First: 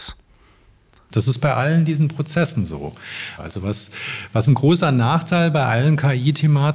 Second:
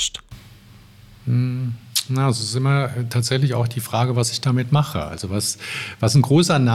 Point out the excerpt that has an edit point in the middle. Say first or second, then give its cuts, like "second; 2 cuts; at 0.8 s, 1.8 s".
first; 2 cuts; at 1.1 s, 3.4 s